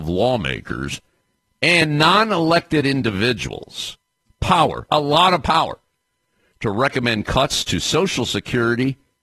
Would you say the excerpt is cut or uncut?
uncut